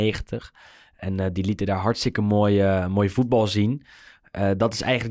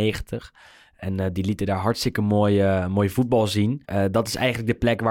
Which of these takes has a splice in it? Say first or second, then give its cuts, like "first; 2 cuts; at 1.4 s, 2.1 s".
second; 1 cut; at 3.8 s